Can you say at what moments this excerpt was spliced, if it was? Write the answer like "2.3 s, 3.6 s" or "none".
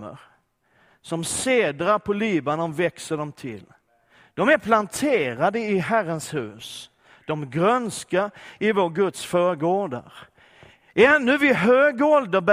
none